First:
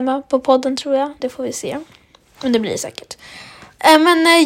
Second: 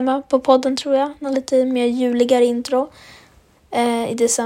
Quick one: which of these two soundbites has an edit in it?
first; 1 cut; at 1.2 s

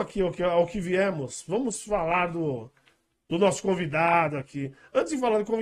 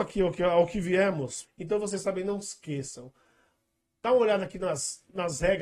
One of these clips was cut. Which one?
second; 1 cut; at 1.4 s

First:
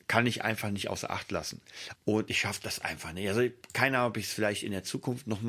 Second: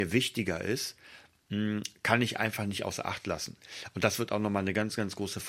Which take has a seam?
first; 1 cut; at 2.0 s

